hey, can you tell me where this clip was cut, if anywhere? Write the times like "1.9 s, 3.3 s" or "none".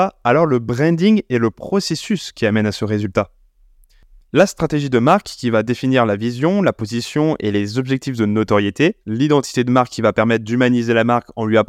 4.2 s, 9.0 s